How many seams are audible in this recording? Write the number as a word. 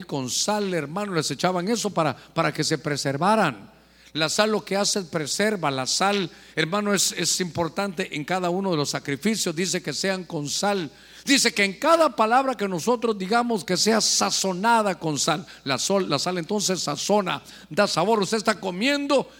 zero